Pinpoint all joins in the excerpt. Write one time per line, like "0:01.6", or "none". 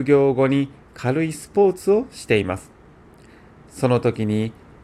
none

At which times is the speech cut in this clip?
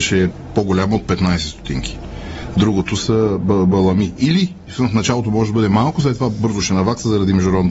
none

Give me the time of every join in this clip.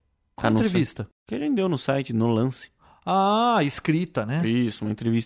0:01.1

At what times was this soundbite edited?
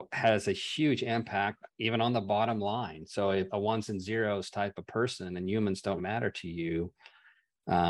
0:03.5
0:06.0

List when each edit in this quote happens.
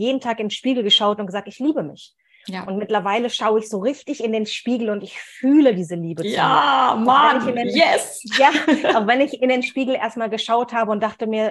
none

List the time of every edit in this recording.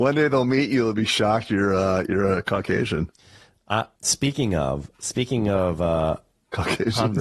0:04.0

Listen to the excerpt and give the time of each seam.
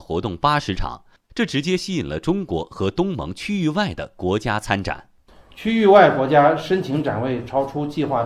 none

